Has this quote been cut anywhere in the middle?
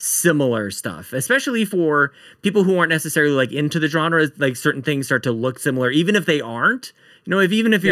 no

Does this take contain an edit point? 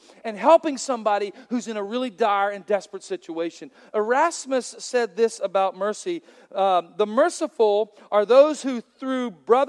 no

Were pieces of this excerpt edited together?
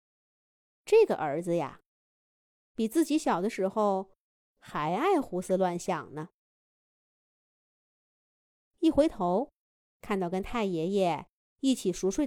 yes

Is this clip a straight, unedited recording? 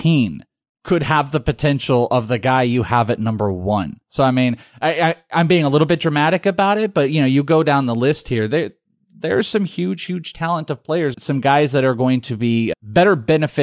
no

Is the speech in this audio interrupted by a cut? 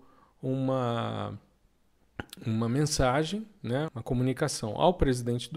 yes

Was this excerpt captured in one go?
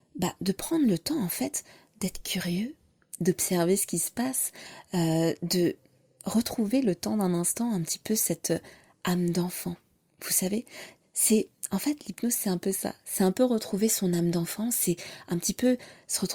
yes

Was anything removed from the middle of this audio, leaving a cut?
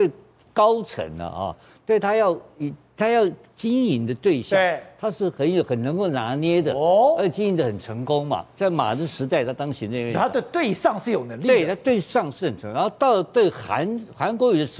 no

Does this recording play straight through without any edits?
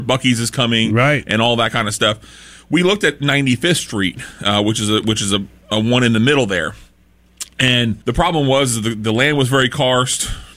no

